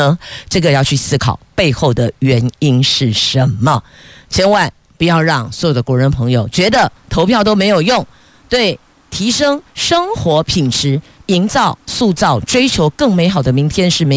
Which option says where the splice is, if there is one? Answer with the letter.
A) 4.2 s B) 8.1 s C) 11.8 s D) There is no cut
D